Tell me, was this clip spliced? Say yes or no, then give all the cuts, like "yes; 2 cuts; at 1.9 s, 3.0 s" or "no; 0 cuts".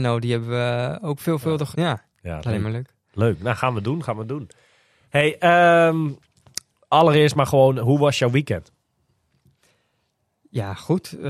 yes; 1 cut; at 1.7 s